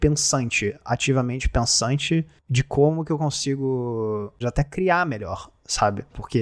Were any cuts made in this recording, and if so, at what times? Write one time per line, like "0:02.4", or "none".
0:04.4